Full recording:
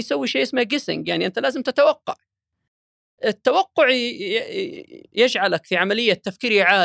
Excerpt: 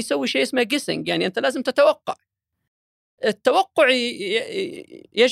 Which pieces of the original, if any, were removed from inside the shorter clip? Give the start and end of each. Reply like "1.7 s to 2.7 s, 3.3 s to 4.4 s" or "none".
none